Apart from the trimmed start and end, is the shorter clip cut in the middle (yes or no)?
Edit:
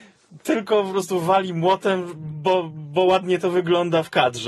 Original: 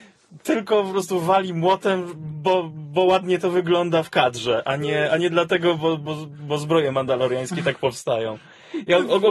no